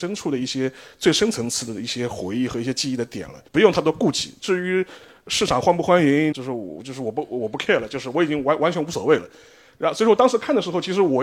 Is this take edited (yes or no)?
yes